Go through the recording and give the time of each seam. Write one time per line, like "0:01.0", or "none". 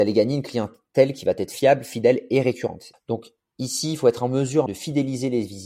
0:02.9
0:04.7